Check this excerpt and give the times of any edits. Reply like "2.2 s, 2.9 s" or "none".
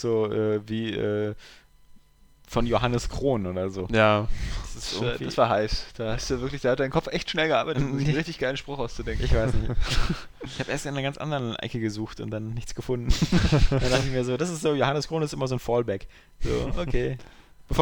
none